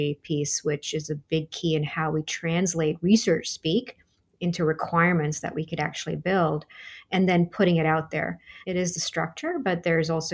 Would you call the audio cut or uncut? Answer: cut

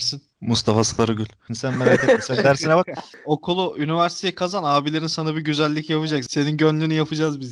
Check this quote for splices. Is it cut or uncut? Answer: cut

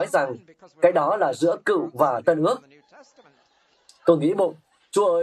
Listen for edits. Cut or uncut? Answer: uncut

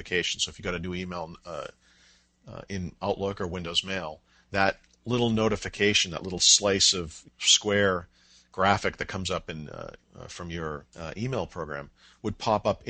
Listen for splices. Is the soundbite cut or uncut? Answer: uncut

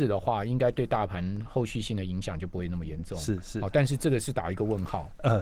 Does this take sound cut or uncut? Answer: uncut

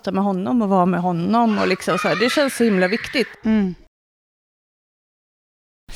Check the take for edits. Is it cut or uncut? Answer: uncut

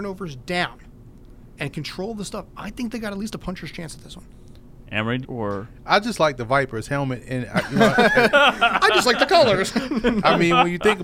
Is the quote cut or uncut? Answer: cut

